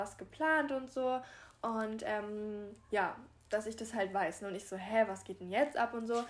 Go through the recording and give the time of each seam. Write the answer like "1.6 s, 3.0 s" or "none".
none